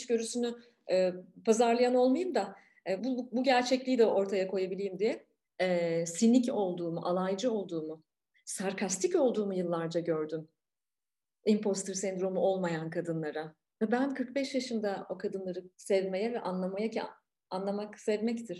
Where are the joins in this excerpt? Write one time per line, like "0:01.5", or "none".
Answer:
0:03.0
0:05.4
0:15.7